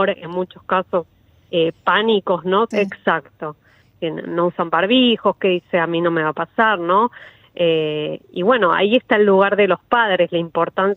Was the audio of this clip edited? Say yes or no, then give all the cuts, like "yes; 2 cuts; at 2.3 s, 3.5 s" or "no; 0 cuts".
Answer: yes; 1 cut; at 2.7 s